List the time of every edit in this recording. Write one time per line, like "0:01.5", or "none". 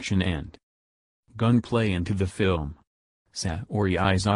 none